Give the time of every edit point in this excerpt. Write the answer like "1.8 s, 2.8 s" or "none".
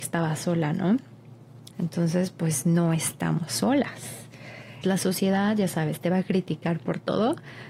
1.7 s, 4.8 s